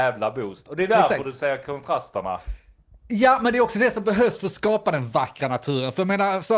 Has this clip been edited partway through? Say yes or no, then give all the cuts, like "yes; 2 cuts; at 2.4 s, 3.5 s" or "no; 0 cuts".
no; 0 cuts